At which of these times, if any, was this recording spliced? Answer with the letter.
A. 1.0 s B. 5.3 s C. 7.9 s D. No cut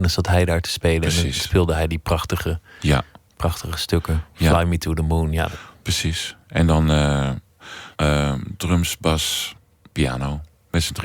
C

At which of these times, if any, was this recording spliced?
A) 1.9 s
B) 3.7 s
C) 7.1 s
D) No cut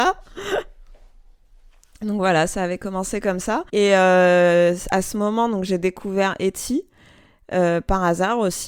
B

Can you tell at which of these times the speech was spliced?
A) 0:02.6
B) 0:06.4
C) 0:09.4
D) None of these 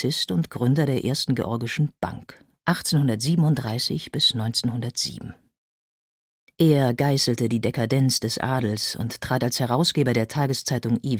A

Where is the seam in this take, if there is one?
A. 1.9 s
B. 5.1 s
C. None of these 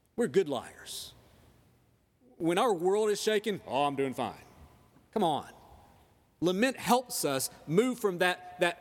C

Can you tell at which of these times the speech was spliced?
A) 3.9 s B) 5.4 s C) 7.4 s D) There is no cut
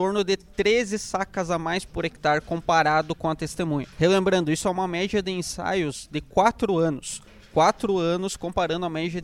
A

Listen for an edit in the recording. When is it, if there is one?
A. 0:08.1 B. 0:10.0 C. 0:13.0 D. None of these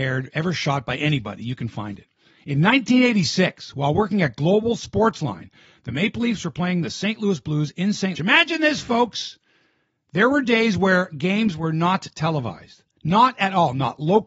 A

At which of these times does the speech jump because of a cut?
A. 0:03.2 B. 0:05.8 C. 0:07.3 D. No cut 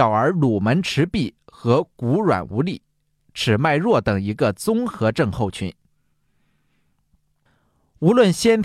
A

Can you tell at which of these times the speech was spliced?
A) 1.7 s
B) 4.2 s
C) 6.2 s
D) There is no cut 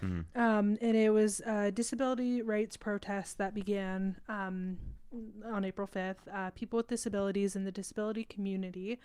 D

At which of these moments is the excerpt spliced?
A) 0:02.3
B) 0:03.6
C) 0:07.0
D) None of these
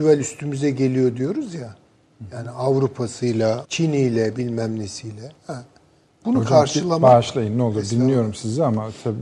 B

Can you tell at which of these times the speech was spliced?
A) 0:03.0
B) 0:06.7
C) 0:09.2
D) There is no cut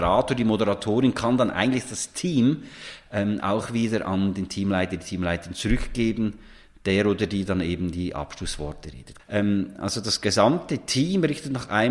C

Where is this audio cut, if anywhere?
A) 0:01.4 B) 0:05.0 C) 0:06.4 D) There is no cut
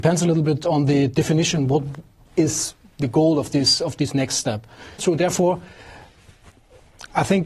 B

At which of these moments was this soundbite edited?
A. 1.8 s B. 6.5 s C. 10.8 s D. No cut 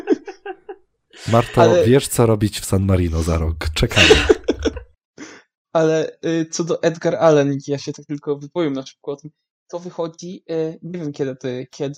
D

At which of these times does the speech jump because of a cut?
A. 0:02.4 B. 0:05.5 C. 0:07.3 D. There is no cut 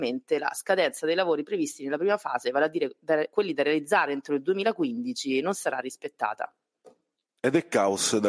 D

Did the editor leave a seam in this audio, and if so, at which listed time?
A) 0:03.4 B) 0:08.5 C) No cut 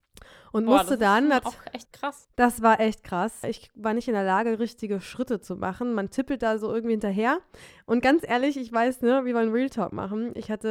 A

